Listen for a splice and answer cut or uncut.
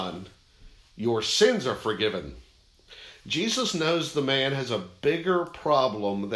uncut